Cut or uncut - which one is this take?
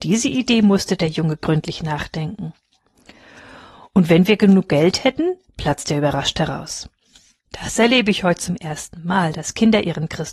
cut